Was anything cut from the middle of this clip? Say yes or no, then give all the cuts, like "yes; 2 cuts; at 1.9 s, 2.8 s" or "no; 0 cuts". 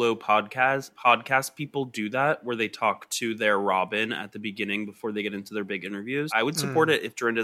yes; 2 cuts; at 1.0 s, 6.3 s